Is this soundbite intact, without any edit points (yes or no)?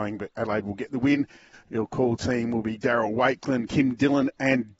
no